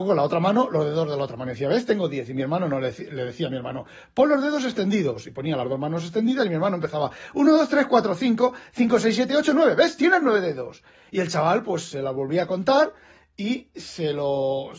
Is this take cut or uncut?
uncut